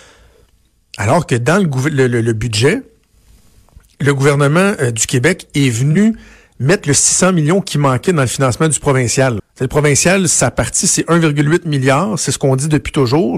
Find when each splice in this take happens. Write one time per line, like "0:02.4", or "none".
0:09.4